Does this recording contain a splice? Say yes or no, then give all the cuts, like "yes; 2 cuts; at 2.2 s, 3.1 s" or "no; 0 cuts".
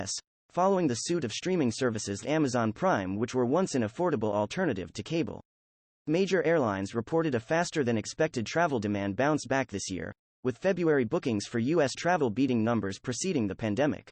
yes; 1 cut; at 2.2 s